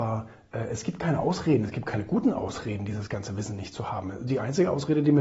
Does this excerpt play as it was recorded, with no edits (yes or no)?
yes